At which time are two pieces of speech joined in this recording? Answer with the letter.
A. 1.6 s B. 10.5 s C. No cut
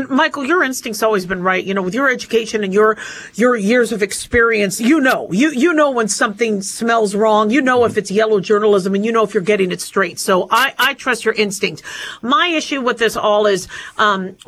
C